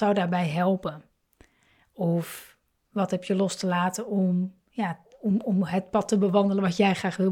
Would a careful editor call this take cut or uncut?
uncut